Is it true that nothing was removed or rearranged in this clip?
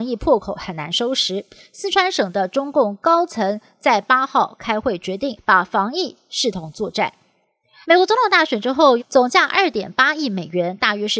no; 3 cuts; at 5.4 s, 7.8 s, 9.0 s

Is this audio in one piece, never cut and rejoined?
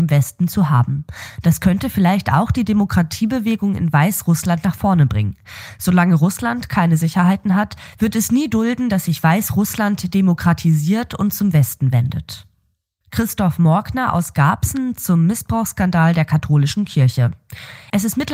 yes; 0 cuts

